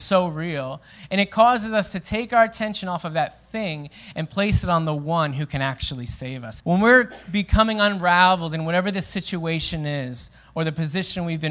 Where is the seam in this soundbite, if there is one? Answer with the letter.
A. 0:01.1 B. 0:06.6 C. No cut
B